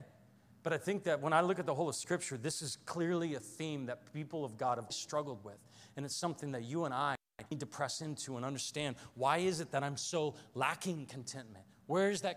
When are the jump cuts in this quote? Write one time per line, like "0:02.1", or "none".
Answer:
0:04.9